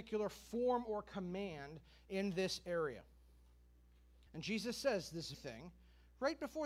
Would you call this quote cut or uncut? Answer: cut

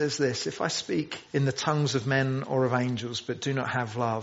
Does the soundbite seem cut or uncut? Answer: cut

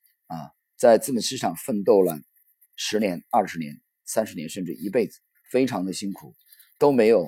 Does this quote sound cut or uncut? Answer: cut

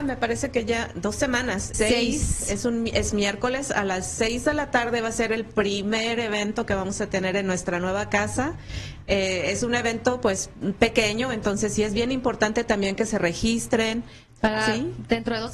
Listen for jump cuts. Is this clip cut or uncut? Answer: cut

